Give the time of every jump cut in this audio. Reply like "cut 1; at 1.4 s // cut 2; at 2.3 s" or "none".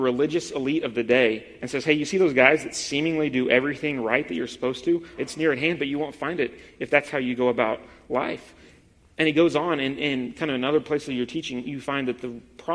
cut 1; at 5.2 s